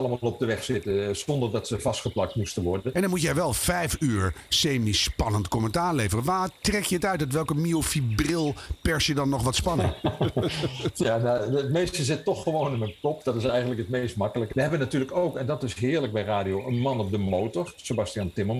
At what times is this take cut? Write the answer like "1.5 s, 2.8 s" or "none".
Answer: 2.9 s, 14.5 s